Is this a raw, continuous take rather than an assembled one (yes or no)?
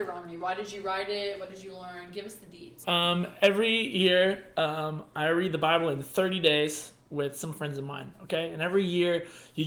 no